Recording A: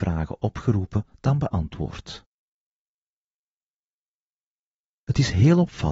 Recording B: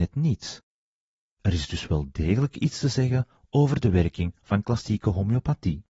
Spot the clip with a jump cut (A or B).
B